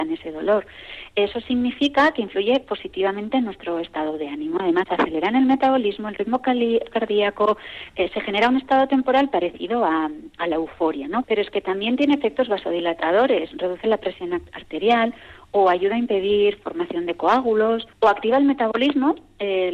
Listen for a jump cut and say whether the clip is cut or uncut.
cut